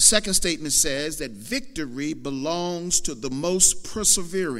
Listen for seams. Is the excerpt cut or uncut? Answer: uncut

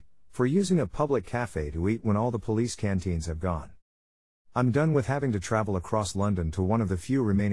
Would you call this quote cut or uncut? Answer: uncut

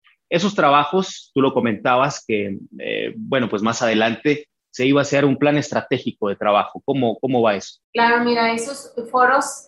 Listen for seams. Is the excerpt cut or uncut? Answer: cut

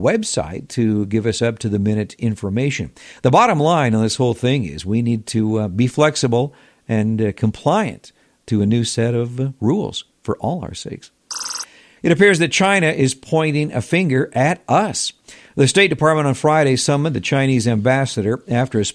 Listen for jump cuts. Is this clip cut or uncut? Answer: uncut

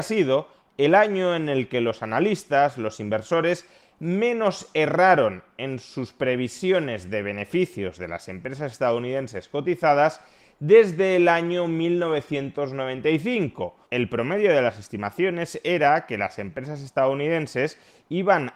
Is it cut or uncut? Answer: cut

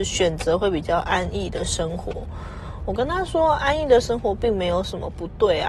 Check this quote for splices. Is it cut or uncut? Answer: uncut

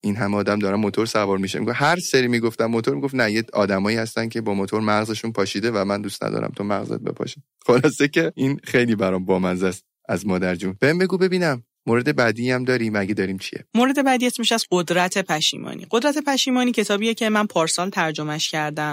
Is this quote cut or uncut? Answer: uncut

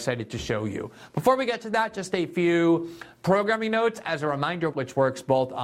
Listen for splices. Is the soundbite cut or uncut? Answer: cut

